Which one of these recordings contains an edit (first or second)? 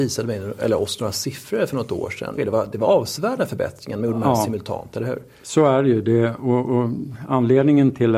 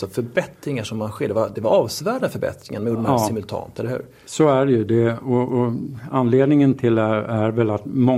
first